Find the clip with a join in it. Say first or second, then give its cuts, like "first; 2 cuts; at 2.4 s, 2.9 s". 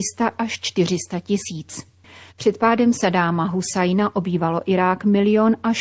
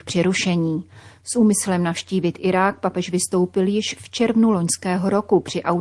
first; 1 cut; at 2.3 s